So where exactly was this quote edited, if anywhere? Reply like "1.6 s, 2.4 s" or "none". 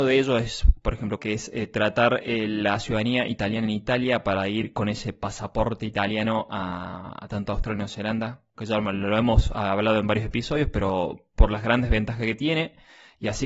1.2 s